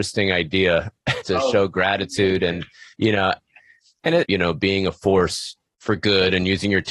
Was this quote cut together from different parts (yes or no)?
yes